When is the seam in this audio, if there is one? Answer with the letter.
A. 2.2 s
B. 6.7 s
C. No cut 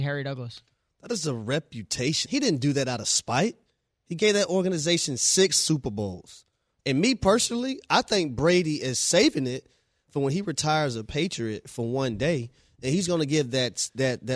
A